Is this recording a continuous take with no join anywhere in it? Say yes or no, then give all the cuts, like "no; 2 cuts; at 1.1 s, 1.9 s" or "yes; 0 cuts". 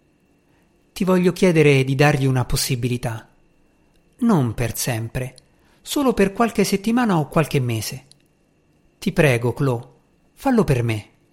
yes; 0 cuts